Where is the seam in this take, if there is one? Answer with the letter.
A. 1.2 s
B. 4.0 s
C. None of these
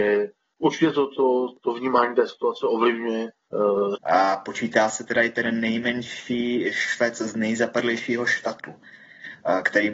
B